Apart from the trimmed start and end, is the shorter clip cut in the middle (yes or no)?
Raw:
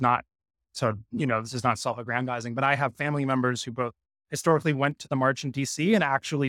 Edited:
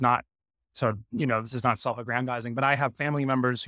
no